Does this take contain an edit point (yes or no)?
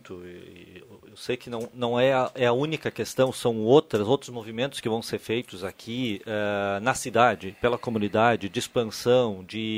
no